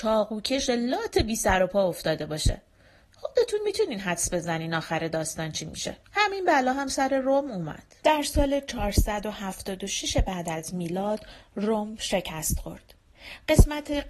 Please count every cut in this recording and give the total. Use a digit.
2